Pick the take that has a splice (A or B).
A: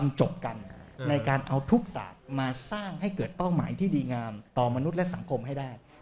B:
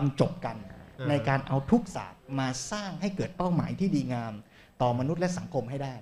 A